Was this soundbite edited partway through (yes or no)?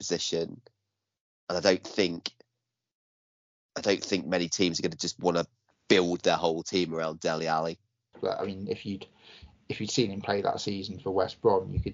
yes